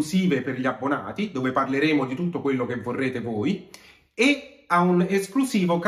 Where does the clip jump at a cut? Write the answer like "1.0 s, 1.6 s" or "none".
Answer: none